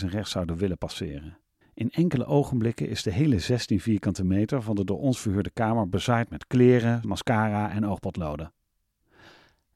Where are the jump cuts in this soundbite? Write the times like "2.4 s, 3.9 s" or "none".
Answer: 1.6 s, 7.0 s

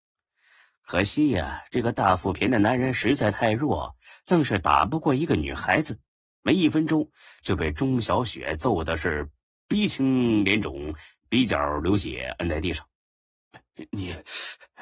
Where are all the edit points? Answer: 2.3 s

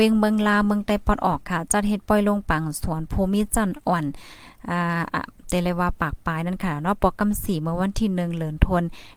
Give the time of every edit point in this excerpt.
5.4 s

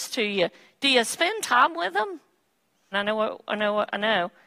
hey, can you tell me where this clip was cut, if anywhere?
2.9 s

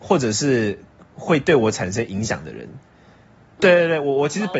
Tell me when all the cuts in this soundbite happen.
3.6 s

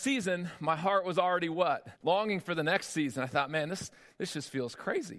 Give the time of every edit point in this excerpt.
2.0 s

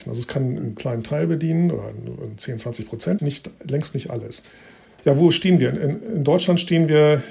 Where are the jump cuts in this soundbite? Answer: 3.2 s

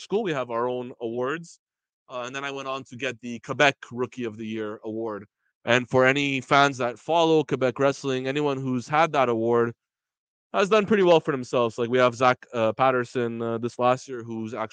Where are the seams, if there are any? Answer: none

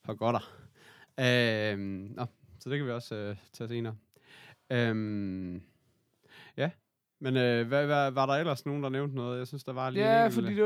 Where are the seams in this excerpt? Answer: none

